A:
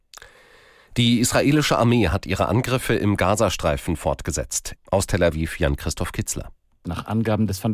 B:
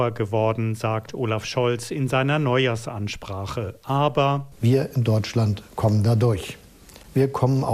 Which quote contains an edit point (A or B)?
A